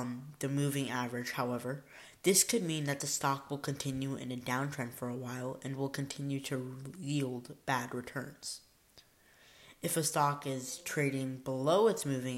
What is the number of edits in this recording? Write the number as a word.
zero